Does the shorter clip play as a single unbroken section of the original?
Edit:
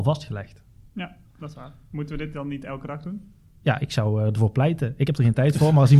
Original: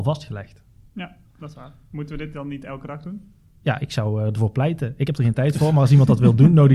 yes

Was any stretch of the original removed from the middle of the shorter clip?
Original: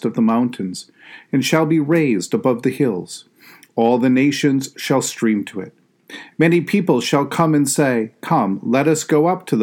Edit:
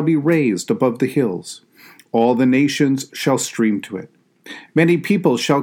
no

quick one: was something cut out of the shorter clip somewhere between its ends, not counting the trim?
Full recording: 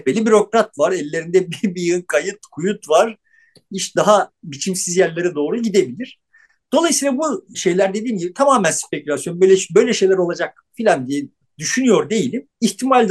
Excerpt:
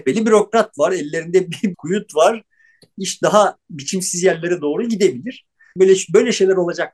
yes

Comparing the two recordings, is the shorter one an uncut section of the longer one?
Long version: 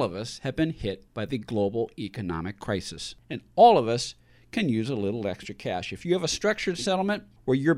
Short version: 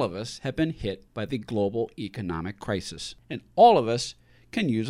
yes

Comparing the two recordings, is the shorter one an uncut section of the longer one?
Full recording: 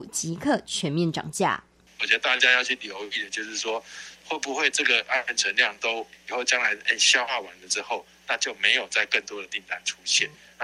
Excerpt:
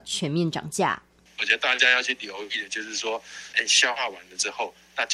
no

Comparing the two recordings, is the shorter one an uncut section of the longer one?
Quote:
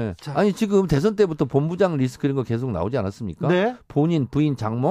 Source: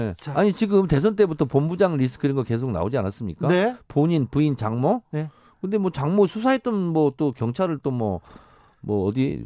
yes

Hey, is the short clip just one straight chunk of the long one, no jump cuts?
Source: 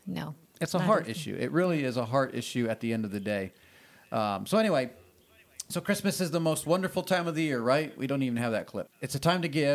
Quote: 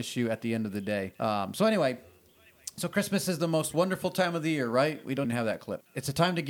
no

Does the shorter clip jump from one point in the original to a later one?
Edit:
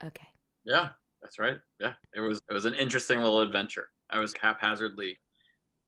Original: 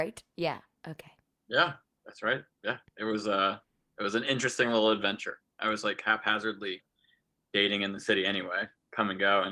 yes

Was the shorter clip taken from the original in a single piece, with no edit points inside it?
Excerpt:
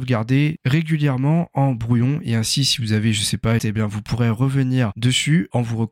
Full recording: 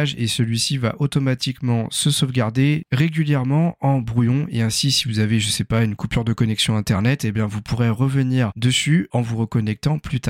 no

